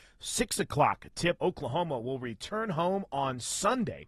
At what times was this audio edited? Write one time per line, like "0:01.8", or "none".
0:01.4